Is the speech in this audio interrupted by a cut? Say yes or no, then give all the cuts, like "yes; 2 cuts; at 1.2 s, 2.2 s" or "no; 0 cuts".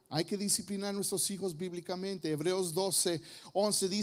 no; 0 cuts